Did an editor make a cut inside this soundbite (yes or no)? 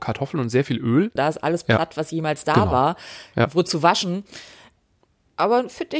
yes